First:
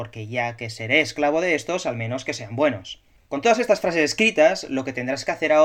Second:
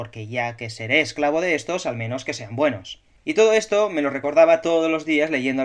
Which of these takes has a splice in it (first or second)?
second